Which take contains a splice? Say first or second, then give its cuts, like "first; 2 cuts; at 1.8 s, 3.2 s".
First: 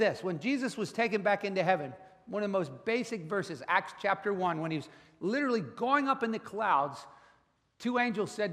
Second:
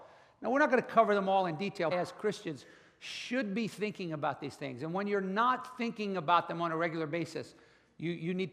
second; 1 cut; at 1.9 s